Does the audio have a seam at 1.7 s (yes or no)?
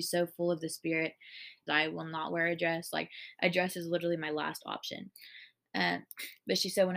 yes